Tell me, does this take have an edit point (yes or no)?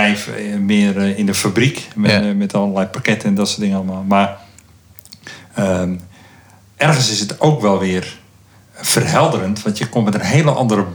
no